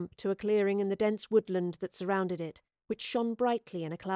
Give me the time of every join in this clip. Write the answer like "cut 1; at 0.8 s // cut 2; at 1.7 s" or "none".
cut 1; at 2.8 s